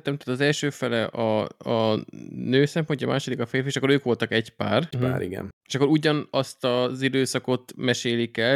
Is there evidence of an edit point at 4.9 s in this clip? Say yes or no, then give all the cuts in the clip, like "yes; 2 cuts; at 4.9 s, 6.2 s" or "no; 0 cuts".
yes; 1 cut; at 4.9 s